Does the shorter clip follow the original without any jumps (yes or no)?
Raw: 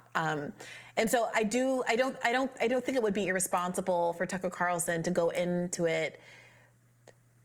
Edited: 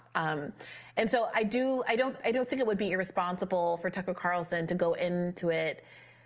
no